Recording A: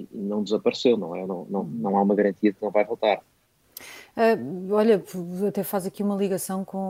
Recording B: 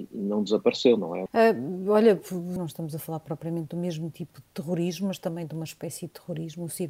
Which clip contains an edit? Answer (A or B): B